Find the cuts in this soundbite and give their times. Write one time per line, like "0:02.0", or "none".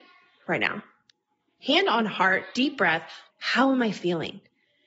0:03.3